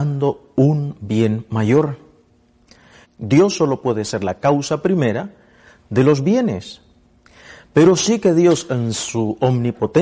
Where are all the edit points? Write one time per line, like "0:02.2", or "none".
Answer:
0:03.0